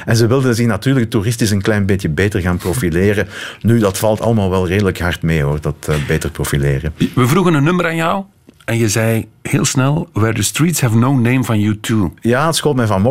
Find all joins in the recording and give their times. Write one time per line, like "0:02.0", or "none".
none